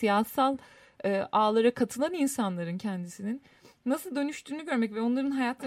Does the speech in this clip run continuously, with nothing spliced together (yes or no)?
yes